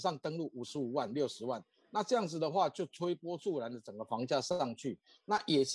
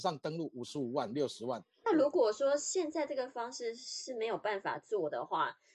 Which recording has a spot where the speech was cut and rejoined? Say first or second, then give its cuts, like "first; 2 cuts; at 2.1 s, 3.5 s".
second; 1 cut; at 1.8 s